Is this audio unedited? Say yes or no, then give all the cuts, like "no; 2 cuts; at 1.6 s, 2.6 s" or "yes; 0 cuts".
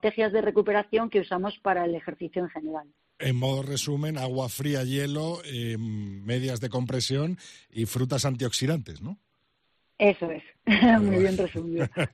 yes; 0 cuts